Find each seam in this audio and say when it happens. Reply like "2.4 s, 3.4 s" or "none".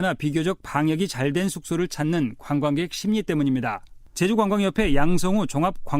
4.1 s